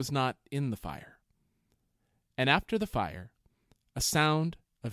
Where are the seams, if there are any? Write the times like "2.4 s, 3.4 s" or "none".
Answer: none